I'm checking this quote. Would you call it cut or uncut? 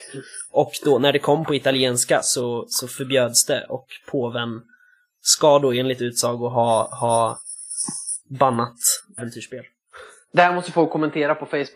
cut